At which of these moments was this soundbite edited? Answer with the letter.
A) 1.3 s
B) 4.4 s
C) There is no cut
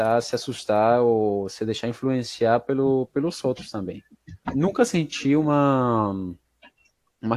B